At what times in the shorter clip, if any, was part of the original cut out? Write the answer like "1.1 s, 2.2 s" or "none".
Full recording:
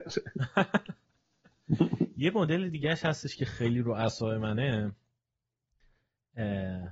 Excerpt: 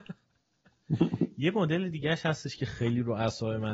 none

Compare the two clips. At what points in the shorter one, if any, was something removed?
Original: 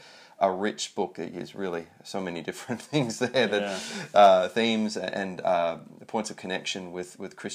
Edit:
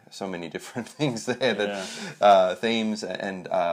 none

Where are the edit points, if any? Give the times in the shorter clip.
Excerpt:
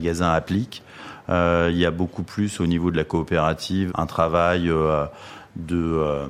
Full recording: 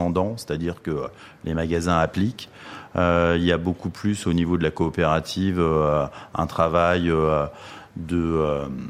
3.9 s

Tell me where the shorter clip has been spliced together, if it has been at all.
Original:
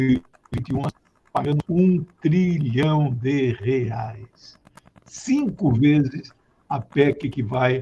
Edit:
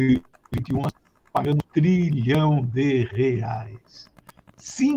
1.6 s

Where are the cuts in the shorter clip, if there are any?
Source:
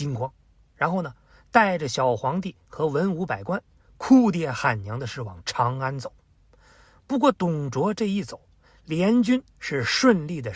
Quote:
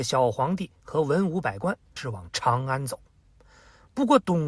2.0 s

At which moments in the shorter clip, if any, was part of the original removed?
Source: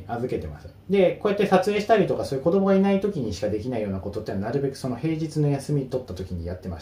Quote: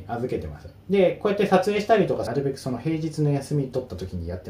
2.3 s

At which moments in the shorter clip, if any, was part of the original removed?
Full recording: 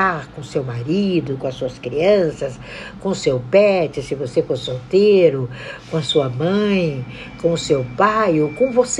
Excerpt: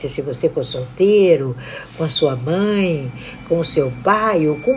none

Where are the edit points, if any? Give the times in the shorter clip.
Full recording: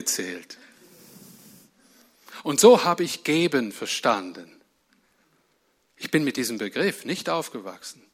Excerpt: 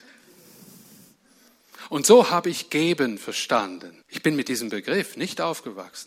4.0 s

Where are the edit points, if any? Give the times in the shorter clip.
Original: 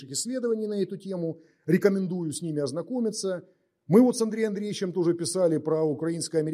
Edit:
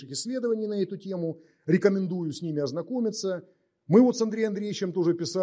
none

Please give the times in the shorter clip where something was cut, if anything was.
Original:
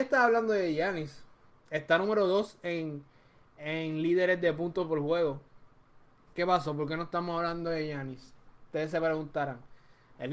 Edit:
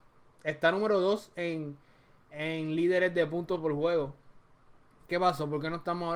none

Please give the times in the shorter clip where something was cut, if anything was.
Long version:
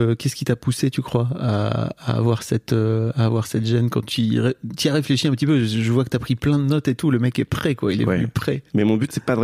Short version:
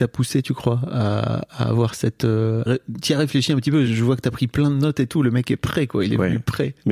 2.7 s, 3.9 s

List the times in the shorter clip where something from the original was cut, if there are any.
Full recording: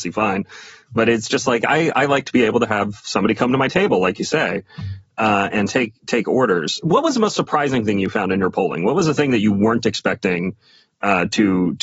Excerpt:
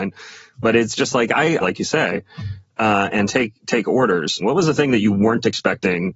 1.6 s, 4.4 s

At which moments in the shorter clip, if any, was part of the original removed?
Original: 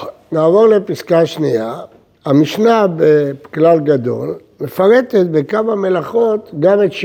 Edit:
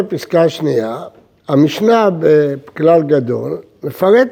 none

